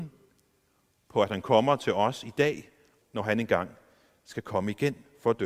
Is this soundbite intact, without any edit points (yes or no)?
no